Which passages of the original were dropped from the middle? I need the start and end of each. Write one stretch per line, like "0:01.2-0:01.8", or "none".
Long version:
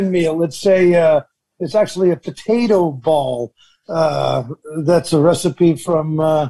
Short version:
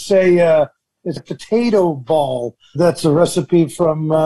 0:01.7-0:02.1
0:03.7-0:04.8